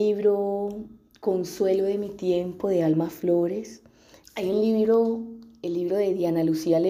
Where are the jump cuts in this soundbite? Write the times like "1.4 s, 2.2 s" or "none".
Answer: 4.2 s